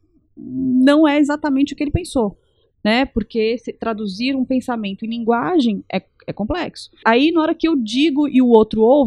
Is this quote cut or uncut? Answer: cut